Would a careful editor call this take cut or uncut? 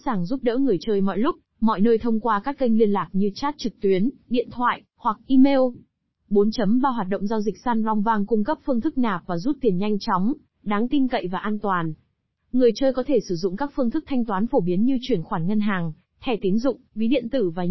uncut